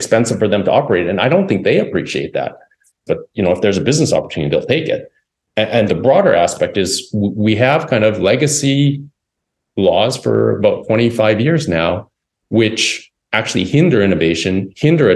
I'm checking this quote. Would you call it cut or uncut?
cut